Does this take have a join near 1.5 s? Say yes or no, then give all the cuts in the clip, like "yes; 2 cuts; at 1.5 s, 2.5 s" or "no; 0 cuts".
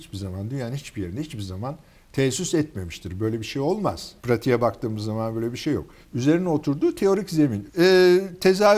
no; 3 cuts; at 4.2 s, 6.0 s, 7.7 s